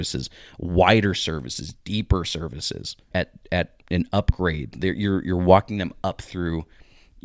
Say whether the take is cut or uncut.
cut